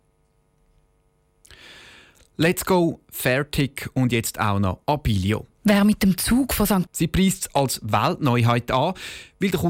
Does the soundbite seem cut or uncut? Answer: cut